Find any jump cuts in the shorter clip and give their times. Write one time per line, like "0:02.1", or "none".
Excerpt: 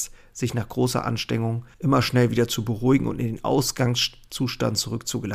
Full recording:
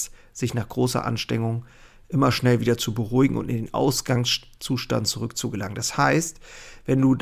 0:01.7